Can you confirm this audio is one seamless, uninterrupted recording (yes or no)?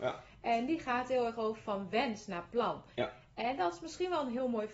yes